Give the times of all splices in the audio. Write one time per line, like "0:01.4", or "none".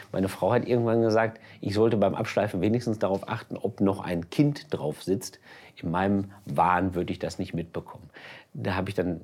none